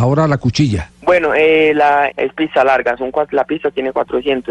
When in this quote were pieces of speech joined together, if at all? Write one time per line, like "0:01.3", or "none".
0:01.0
0:02.1

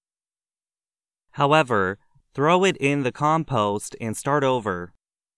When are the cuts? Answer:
0:02.2

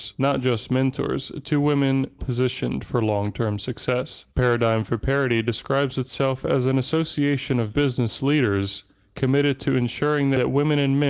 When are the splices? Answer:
0:02.2
0:04.3

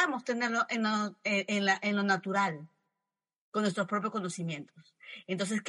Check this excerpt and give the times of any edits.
none

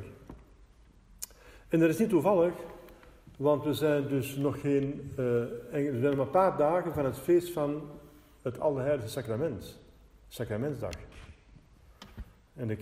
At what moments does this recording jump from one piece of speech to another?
none

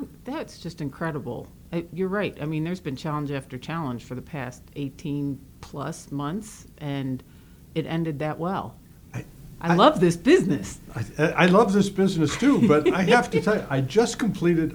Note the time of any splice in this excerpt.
none

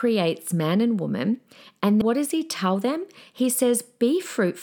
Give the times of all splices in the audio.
0:02.0

